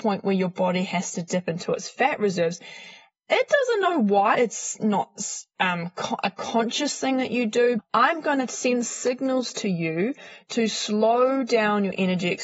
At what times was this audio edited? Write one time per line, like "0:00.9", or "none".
0:04.3
0:07.8